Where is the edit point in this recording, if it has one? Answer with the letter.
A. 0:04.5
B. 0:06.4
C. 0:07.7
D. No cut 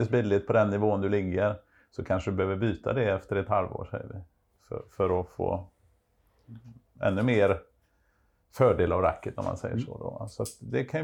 D